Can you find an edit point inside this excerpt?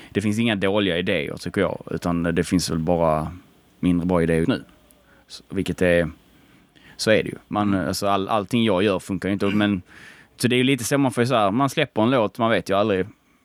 yes; 1 cut; at 4.4 s

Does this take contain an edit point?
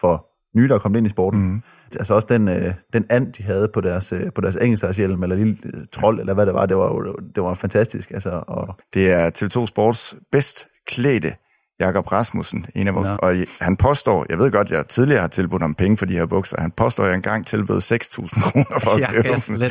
yes; 3 cuts; at 1.9 s, 8.8 s, 13.2 s

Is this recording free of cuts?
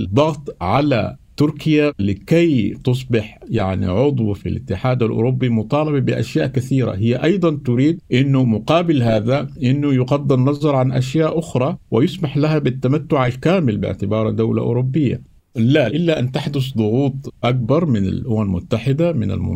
no; 1 cut; at 15.4 s

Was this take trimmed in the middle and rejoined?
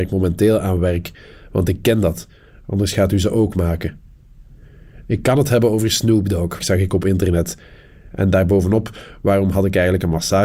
yes; 2 cuts; at 6.6 s, 8.1 s

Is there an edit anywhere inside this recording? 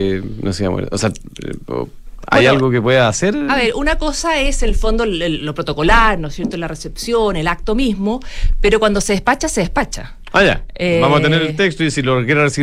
no; 0 cuts

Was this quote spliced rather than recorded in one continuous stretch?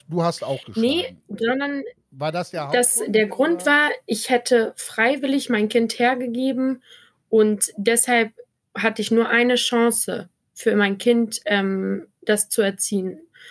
no; 0 cuts

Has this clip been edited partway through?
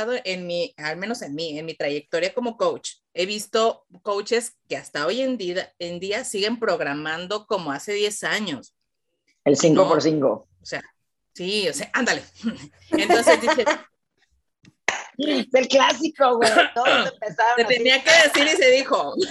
no; 0 cuts

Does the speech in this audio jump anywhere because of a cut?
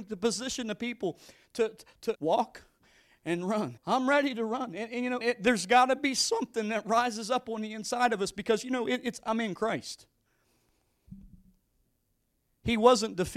yes; 3 cuts; at 2.1 s, 3.8 s, 5.2 s

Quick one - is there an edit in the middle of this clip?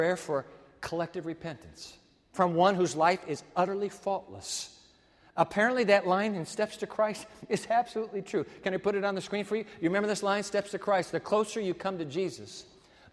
no; 0 cuts

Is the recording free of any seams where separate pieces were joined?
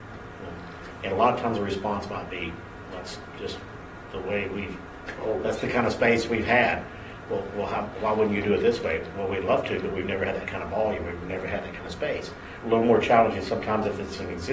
no; 1 cut; at 12.6 s

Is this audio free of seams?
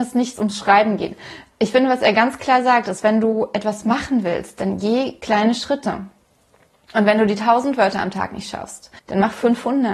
no; 1 cut; at 9.0 s

